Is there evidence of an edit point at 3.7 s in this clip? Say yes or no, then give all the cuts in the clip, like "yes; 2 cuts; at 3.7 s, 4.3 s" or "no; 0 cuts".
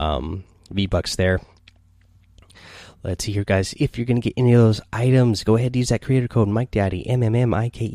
no; 0 cuts